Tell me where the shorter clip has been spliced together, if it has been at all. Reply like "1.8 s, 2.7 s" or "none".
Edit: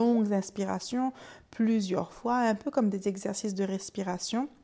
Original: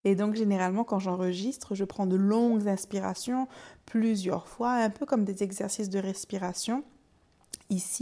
none